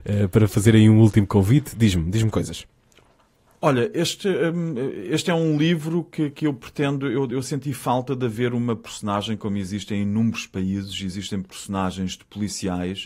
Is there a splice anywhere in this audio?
no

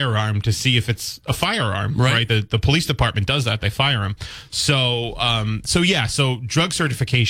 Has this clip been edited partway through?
no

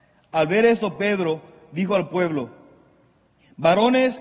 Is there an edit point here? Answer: no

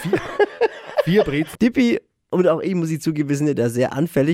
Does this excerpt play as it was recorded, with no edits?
no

